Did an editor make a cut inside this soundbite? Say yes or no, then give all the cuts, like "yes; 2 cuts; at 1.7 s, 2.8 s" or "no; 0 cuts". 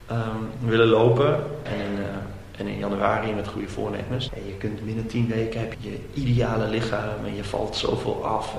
yes; 3 cuts; at 1.7 s, 4.3 s, 5.7 s